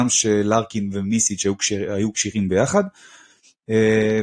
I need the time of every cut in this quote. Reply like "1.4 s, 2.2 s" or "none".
none